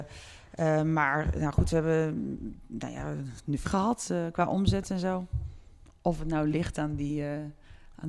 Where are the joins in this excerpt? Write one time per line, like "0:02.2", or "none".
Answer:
0:03.6